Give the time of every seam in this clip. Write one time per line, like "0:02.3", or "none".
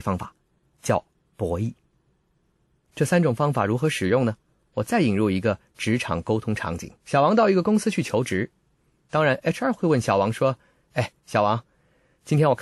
0:07.0